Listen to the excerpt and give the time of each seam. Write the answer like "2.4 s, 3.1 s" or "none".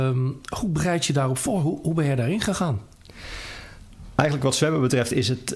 none